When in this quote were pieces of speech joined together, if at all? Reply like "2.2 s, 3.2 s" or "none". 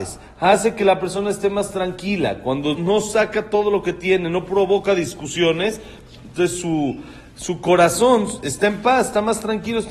2.8 s